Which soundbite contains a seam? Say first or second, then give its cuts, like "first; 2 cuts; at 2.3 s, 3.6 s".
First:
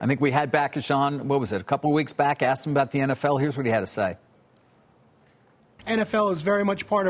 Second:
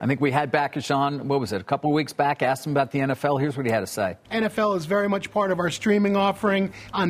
second; 1 cut; at 4.2 s